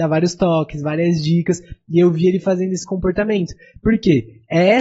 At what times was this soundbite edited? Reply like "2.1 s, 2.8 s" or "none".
none